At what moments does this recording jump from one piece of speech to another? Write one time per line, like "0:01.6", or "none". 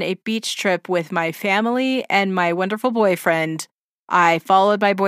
none